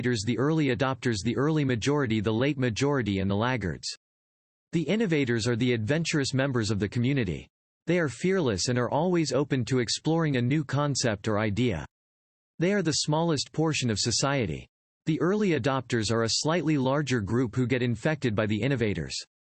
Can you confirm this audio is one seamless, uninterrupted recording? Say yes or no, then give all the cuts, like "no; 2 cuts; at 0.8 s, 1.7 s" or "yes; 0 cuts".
yes; 0 cuts